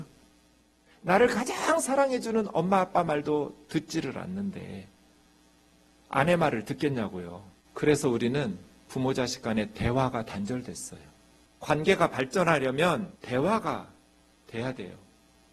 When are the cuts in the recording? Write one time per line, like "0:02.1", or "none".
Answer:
0:07.7
0:11.5
0:13.2